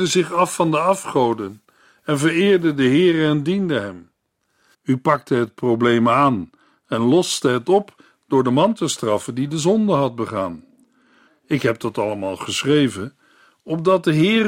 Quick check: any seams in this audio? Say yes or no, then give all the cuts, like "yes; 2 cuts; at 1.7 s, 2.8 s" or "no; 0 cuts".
yes; 2 cuts; at 4.7 s, 11.3 s